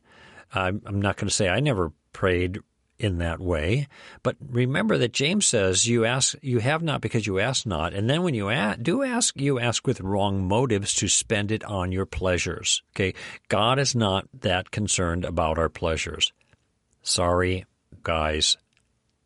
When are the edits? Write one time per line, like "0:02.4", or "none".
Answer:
0:12.9
0:18.0